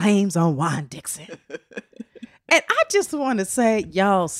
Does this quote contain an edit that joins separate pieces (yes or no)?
no